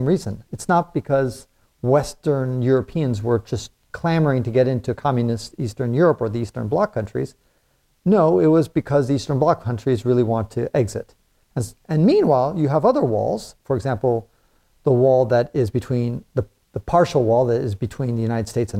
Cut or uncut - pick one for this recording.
uncut